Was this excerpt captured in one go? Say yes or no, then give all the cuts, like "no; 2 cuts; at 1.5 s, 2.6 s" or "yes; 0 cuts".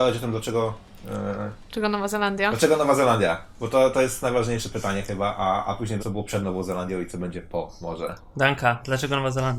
no; 1 cut; at 6.0 s